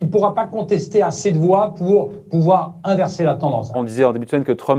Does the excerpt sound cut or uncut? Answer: cut